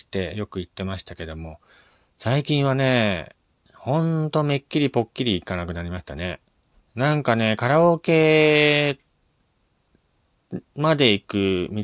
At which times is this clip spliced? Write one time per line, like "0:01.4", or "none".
0:06.7